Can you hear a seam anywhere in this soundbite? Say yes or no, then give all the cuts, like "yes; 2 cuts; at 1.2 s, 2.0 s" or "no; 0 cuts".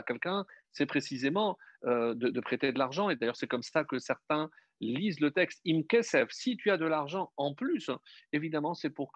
no; 0 cuts